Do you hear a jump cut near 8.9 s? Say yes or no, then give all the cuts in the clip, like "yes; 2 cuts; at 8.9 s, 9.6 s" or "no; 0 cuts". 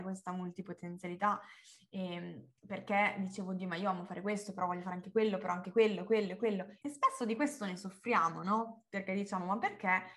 no; 1 cut; at 6.8 s